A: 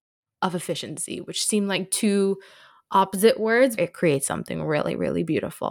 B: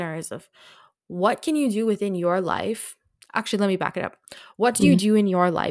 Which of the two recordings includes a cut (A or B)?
A